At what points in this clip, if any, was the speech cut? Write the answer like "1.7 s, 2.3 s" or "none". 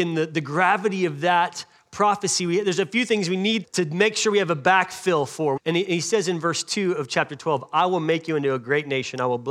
3.6 s, 5.6 s